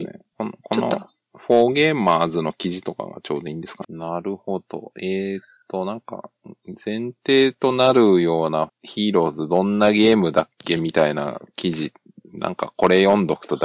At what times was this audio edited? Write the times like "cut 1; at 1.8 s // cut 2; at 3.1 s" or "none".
cut 1; at 3.8 s // cut 2; at 8.7 s